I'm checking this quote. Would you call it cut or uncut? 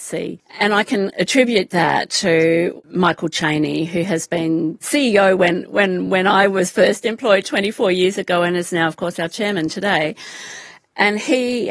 uncut